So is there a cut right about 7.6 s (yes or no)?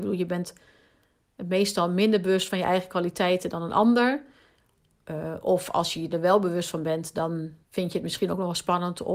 yes